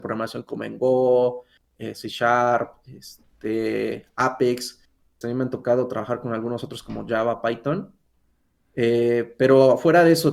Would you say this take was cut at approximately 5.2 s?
yes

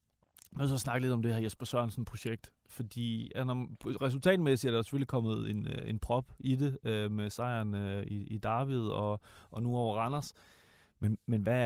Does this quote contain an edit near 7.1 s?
no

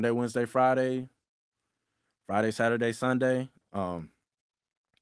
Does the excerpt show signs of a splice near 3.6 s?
yes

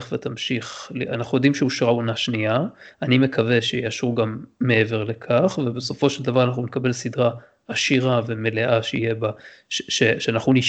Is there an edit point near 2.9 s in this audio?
no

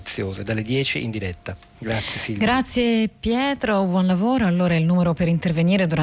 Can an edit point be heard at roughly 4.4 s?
no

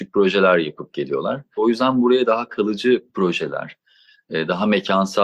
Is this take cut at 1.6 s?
yes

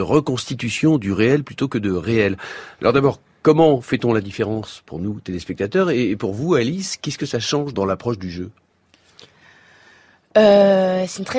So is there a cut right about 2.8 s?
no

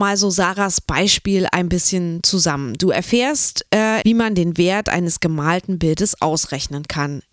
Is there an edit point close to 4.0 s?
yes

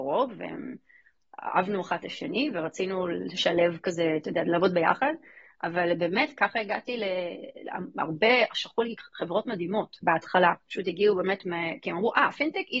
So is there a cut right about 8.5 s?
no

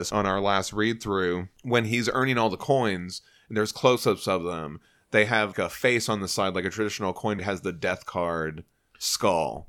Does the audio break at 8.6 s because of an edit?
no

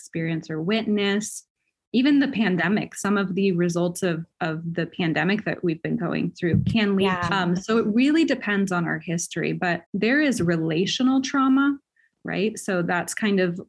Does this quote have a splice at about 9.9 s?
yes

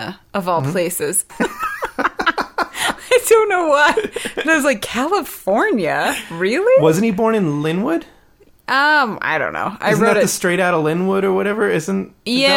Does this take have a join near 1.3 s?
yes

